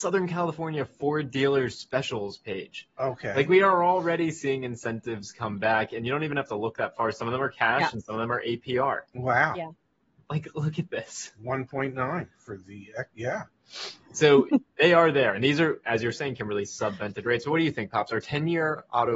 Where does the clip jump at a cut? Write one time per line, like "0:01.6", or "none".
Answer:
none

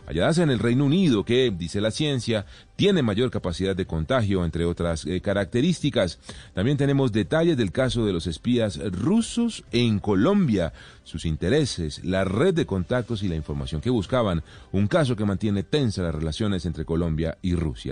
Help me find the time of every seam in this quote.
none

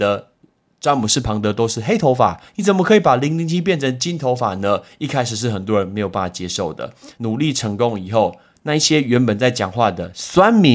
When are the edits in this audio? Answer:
0:02.5
0:07.1

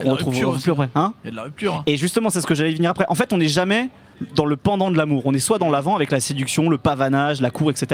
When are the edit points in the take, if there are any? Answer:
none

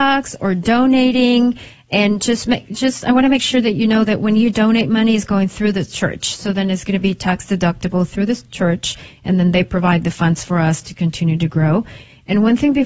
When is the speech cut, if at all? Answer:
none

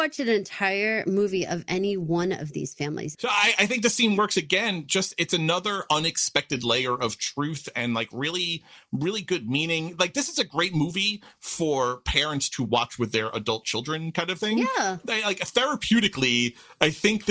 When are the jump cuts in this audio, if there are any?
0:03.1

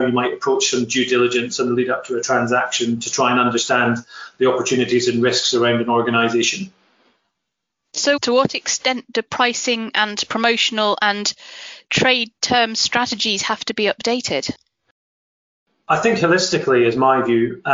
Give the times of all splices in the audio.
0:08.2

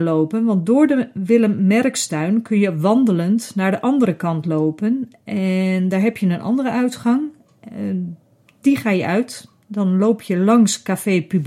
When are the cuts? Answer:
none

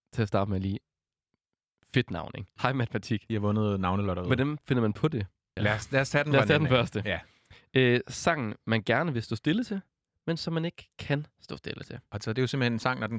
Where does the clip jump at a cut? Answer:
0:02.6
0:05.6

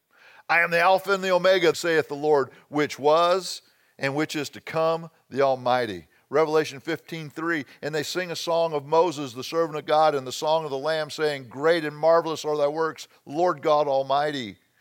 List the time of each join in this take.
0:01.7

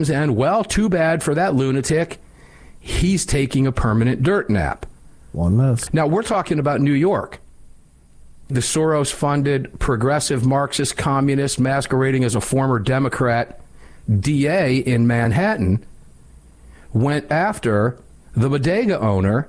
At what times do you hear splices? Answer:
0:05.9
0:08.5

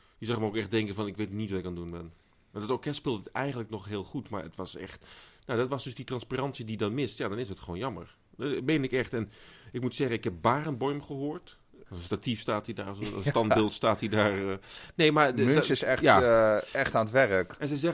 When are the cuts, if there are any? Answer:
0:11.9

